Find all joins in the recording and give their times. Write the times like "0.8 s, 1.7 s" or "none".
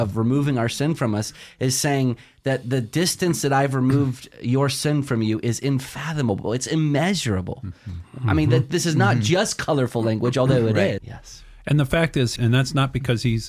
11.0 s, 12.4 s